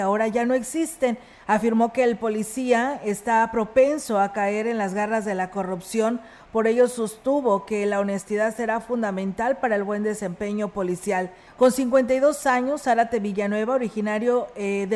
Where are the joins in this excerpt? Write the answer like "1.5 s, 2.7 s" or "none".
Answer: 1.4 s, 11.5 s